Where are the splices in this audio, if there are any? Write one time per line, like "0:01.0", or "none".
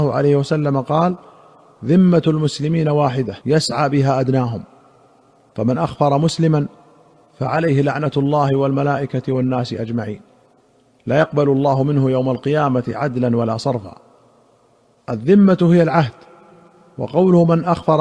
0:03.4